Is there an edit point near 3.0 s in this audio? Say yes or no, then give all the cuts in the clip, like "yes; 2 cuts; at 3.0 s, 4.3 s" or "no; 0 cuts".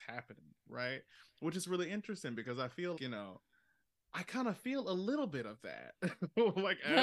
yes; 1 cut; at 3.0 s